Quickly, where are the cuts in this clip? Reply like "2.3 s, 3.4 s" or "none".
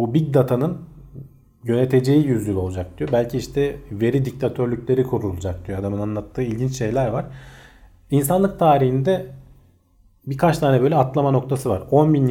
none